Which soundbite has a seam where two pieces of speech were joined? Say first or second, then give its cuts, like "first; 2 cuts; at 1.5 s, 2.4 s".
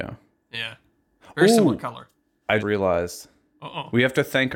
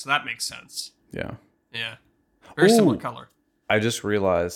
first; 1 cut; at 2.6 s